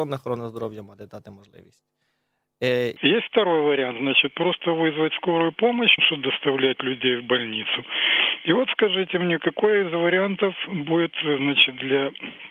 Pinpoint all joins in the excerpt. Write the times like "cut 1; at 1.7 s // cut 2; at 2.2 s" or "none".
cut 1; at 3.0 s // cut 2; at 6.0 s